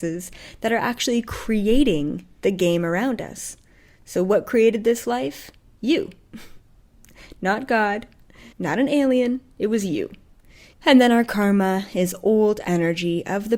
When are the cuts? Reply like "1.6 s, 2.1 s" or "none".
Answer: 8.5 s, 10.7 s